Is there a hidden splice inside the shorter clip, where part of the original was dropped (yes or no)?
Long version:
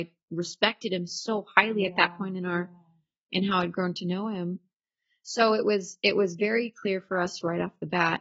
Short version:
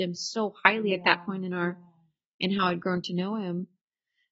no